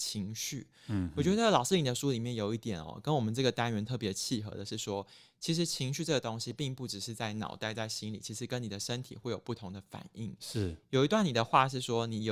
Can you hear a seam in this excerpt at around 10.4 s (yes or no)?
no